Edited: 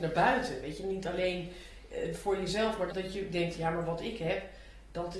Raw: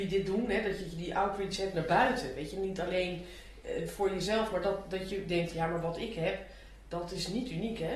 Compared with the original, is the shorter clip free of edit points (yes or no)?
no